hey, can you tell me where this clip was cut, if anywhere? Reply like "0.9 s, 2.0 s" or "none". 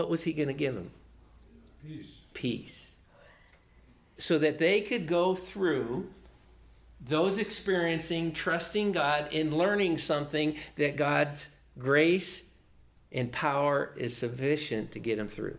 4.2 s